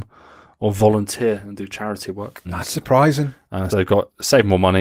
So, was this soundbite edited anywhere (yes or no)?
yes